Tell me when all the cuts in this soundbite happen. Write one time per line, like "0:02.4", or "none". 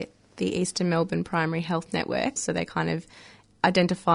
0:02.4

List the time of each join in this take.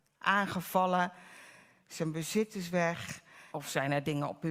0:03.5

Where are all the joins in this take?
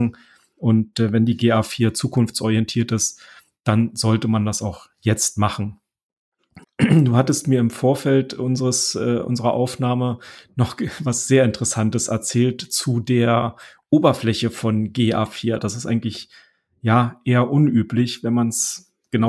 0:06.6
0:15.6

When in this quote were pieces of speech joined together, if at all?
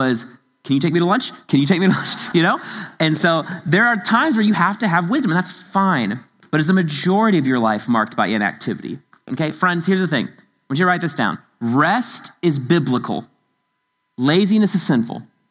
0:02.3

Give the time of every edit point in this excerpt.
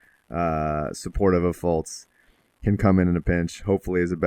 none

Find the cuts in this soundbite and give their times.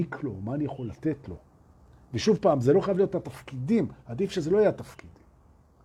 none

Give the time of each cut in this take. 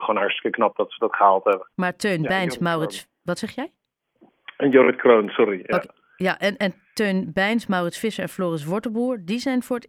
0:01.7

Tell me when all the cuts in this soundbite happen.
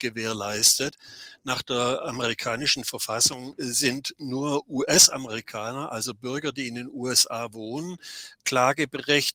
none

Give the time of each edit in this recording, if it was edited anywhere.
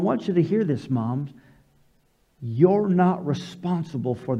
none

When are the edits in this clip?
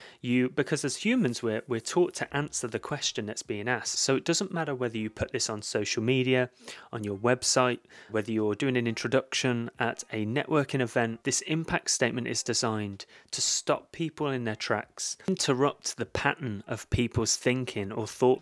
0:03.9
0:08.1
0:11.2

